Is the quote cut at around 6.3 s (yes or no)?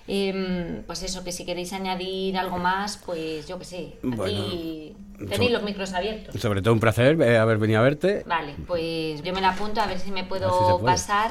no